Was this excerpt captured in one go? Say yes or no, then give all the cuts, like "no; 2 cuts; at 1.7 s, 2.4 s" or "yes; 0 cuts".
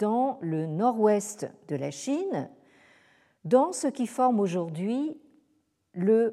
yes; 0 cuts